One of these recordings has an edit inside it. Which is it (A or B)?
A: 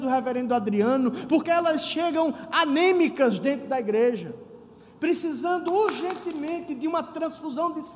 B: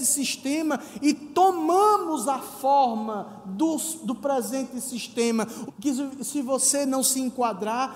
B